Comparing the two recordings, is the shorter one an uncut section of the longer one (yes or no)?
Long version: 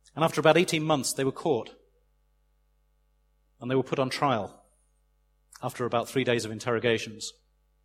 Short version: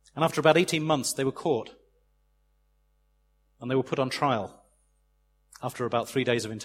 yes